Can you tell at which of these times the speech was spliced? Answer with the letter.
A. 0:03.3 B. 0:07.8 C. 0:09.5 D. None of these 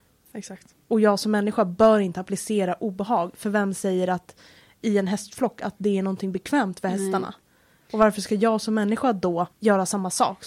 C